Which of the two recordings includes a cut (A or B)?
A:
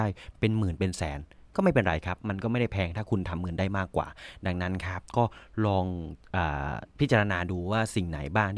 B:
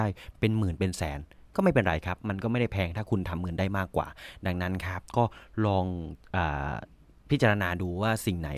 A